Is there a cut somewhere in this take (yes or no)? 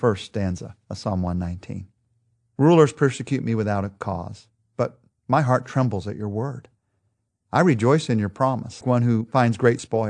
yes